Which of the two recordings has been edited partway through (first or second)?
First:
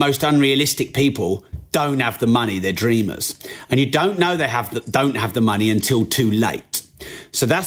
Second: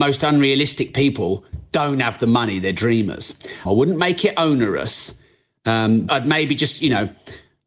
second